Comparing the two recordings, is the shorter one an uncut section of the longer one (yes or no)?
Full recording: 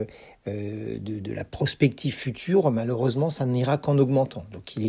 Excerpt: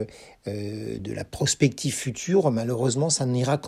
no